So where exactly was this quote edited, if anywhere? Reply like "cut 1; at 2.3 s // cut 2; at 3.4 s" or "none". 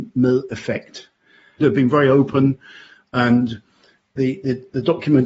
cut 1; at 1.6 s